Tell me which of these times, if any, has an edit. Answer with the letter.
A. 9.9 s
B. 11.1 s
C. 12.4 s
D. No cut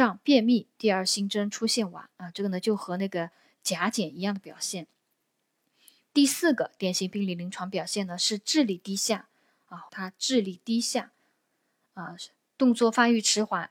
A